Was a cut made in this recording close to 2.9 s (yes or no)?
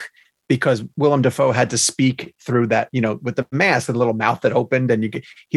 no